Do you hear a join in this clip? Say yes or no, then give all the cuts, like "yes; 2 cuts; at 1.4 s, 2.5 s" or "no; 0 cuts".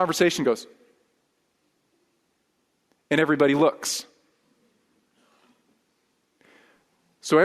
no; 0 cuts